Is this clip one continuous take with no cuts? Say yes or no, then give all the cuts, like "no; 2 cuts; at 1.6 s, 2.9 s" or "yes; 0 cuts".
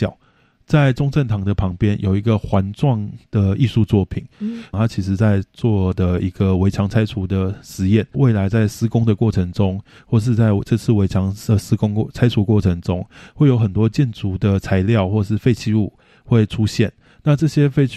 no; 2 cuts; at 4.7 s, 8.1 s